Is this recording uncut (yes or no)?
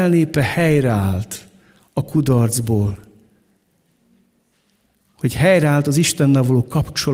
yes